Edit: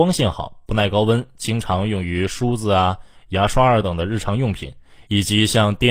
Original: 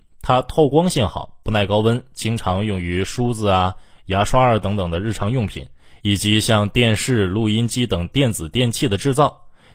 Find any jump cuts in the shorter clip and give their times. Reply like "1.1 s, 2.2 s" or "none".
3.8 s